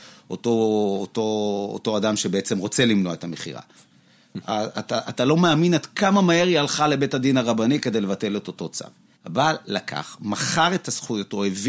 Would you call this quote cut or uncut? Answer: cut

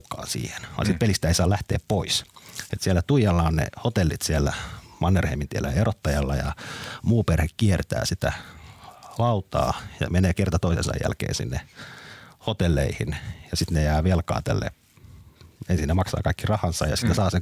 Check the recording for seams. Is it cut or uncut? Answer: uncut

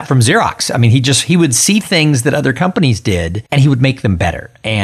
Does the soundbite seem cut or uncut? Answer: cut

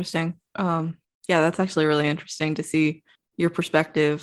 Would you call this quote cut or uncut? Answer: uncut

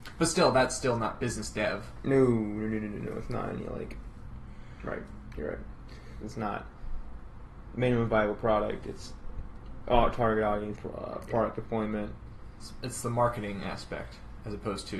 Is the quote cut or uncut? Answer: cut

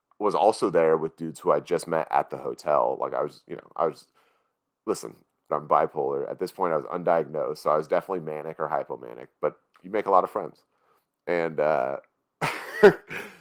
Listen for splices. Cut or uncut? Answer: cut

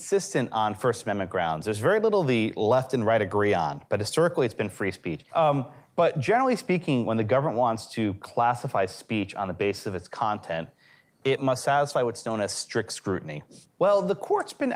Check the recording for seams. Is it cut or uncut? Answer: cut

